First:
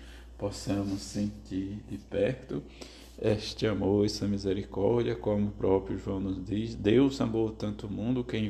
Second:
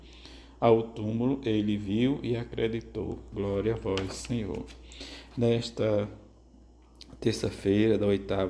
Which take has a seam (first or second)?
second